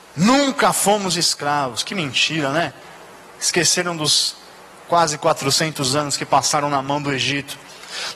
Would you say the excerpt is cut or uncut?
uncut